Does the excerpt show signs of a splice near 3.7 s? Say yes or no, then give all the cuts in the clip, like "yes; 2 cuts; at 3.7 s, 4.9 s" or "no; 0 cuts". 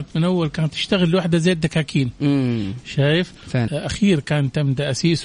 yes; 1 cut; at 3.7 s